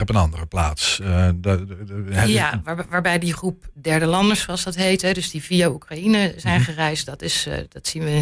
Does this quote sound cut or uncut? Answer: uncut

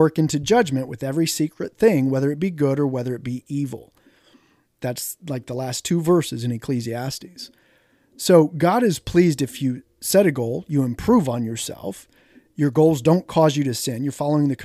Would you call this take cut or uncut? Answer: uncut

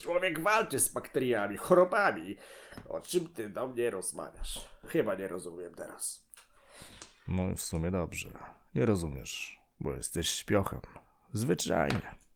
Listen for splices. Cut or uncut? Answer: uncut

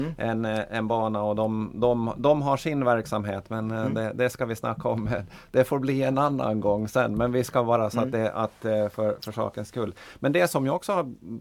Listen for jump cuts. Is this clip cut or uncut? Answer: uncut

